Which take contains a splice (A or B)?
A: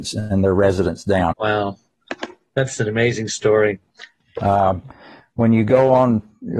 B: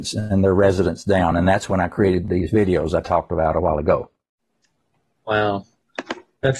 A